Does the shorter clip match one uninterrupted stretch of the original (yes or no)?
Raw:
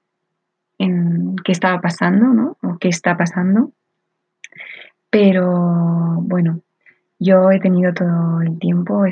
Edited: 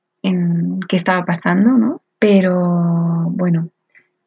no